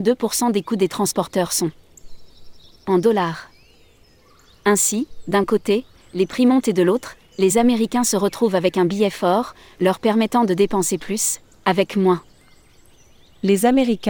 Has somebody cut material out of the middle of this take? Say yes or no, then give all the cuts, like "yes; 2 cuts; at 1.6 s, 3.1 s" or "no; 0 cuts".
yes; 1 cut; at 6.0 s